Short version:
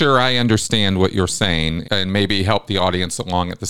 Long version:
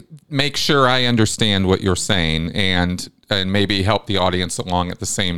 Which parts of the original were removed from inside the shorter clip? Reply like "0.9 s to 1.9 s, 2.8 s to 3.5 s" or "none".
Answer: 2.5 s to 3.2 s